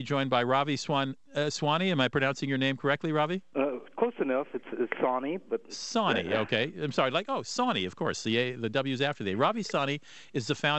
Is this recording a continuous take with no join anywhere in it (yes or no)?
yes